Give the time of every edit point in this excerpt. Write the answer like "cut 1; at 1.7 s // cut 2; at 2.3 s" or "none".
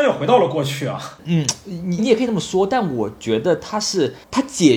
cut 1; at 2.0 s